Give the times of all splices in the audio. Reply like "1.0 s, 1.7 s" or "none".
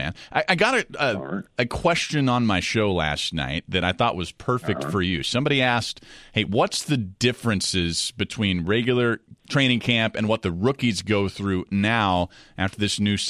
9.4 s